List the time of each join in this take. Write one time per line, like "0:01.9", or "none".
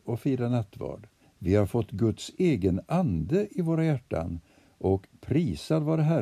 0:01.2